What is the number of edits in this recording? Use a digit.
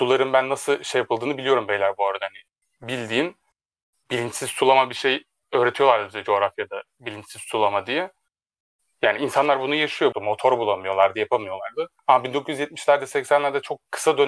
3